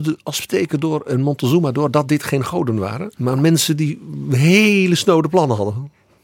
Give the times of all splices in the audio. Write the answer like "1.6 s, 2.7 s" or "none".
none